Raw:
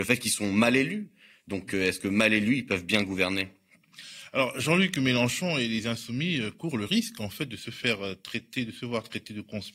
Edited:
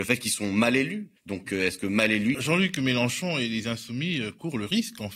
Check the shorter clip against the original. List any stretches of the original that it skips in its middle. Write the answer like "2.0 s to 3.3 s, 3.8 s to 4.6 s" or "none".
1.2 s to 1.4 s, 2.6 s to 4.5 s